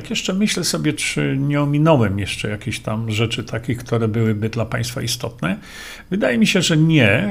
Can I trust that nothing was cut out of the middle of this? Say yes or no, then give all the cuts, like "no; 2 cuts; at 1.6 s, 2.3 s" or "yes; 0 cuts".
no; 1 cut; at 1.0 s